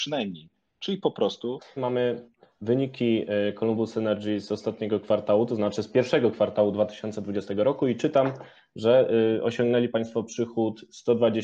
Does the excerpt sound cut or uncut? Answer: cut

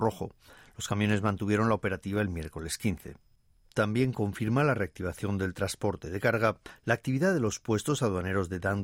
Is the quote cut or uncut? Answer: uncut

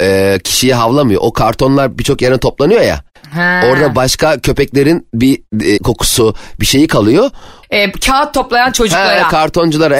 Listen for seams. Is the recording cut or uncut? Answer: cut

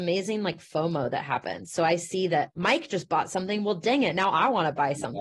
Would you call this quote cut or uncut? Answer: cut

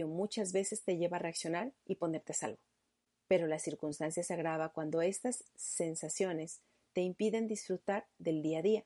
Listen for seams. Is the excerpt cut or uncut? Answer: uncut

